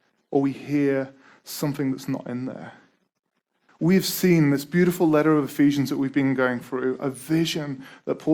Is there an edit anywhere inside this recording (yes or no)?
yes